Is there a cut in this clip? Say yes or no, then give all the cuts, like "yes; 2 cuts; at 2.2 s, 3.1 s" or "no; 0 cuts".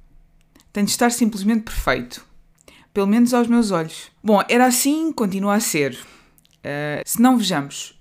yes; 2 cuts; at 4.2 s, 7.0 s